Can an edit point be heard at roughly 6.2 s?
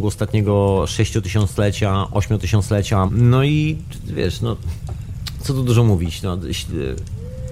no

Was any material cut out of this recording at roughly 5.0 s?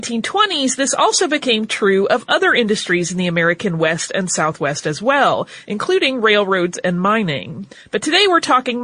no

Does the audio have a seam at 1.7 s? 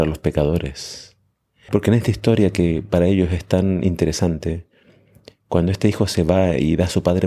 yes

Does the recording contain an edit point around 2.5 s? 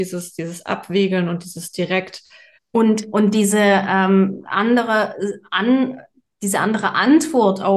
yes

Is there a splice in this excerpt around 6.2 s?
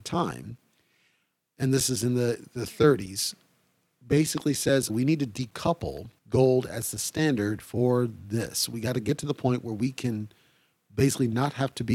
yes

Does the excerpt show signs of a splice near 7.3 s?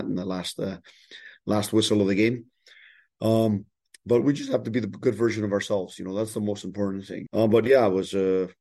yes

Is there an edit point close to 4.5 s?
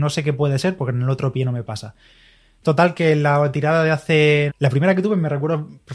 yes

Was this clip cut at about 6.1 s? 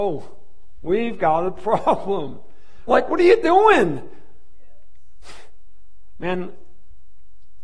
no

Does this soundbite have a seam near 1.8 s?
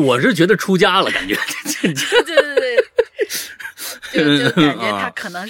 no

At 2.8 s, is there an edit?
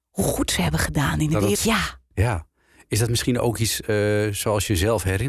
no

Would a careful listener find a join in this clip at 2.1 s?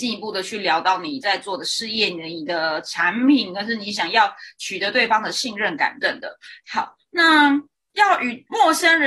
no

